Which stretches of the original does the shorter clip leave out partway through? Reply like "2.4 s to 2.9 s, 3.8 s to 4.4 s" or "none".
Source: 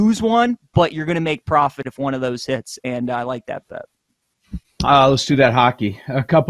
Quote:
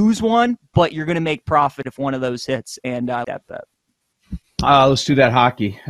3.2 s to 3.5 s